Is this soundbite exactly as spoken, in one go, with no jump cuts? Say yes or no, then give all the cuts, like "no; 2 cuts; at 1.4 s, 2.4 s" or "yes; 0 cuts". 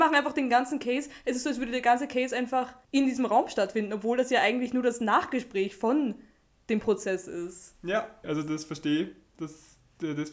no; 1 cut; at 8.2 s